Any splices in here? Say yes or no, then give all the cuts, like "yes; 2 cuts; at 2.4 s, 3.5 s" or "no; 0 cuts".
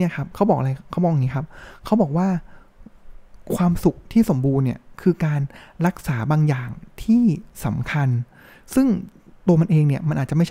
no; 0 cuts